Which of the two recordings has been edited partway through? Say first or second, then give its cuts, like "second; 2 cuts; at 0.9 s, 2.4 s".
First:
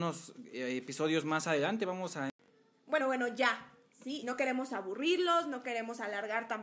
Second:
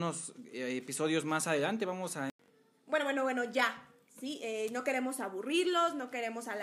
first; 2 cuts; at 3.0 s, 4.2 s